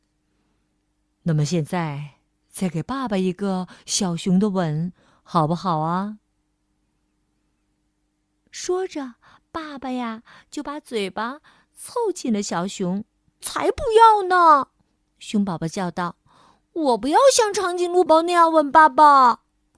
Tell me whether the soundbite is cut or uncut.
cut